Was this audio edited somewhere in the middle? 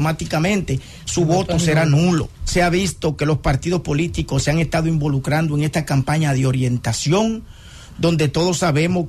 yes; 1 cut; at 2.3 s

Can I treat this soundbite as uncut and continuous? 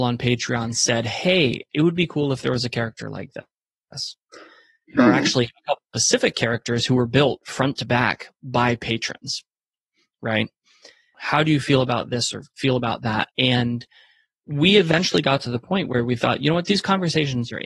no; 2 cuts; at 11.1 s, 13.3 s

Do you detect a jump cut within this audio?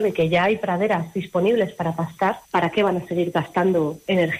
yes; 1 cut; at 2.4 s

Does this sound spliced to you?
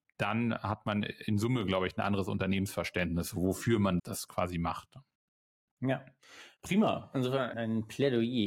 yes; 2 cuts; at 4.0 s, 7.5 s

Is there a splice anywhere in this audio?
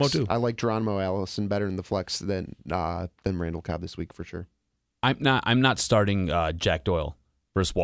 no; 0 cuts

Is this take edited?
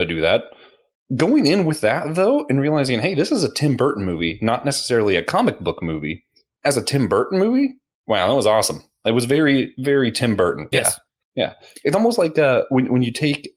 yes; 1 cut; at 10.7 s

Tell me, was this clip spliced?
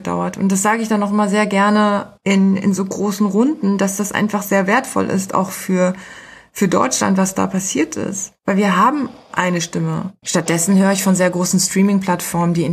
yes; 1 cut; at 10.2 s

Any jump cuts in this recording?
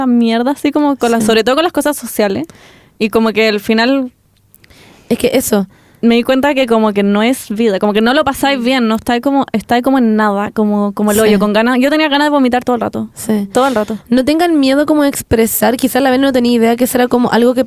no; 0 cuts

